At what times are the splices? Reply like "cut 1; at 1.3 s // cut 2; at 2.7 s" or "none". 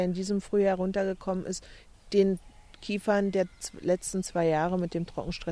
cut 1; at 1.9 s